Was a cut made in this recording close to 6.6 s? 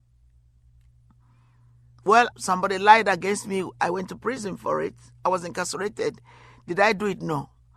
no; 1 cut; at 2.3 s

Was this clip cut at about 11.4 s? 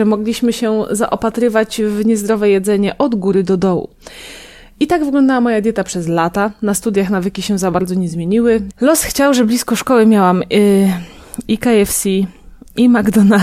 yes; 2 cuts; at 8.7 s, 11.4 s

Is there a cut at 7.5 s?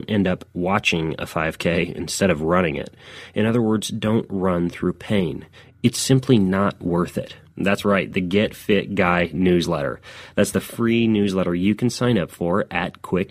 yes; 1 cut; at 7.5 s

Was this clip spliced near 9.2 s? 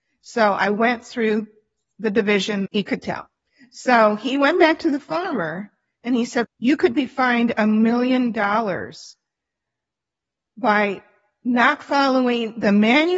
no; 2 cuts; at 2.7 s, 6.4 s

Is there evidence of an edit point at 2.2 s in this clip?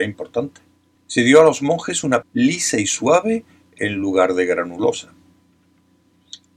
yes; 2 cuts; at 1.0 s, 2.2 s

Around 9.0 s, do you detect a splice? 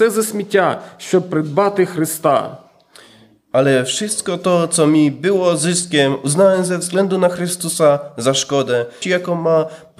yes; 1 cut; at 9.0 s

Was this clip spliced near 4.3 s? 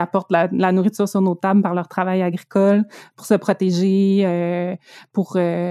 no; 0 cuts

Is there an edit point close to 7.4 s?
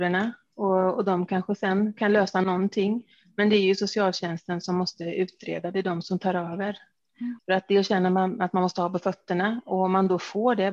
yes; 1 cut; at 7.4 s

